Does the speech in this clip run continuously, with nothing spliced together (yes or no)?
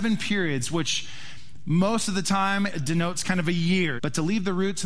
no